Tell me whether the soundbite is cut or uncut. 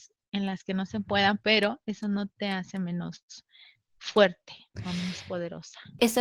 uncut